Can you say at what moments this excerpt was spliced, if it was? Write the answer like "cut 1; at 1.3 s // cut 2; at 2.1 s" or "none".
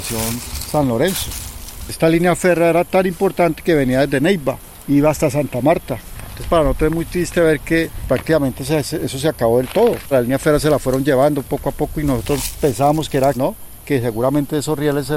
cut 1; at 10.1 s // cut 2; at 13.3 s